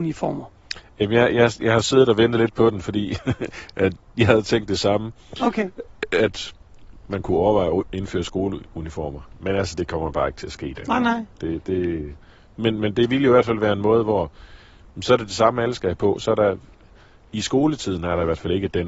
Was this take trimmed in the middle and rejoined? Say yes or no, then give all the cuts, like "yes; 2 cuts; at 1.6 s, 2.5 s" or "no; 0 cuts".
no; 0 cuts